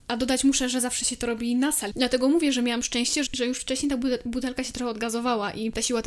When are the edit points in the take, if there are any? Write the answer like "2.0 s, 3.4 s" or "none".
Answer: 1.9 s, 3.3 s